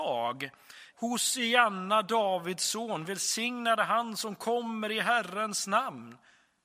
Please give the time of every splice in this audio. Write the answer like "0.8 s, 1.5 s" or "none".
0.9 s